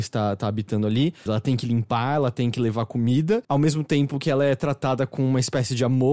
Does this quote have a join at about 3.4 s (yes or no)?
yes